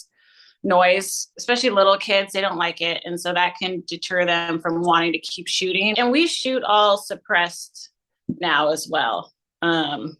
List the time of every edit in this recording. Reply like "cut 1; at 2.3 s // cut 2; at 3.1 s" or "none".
cut 1; at 5.9 s